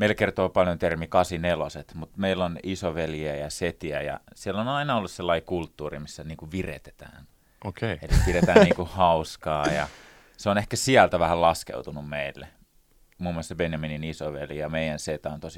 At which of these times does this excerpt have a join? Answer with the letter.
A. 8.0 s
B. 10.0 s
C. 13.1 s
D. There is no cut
D